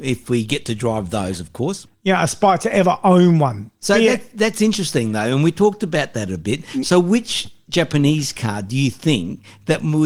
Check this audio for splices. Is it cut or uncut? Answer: cut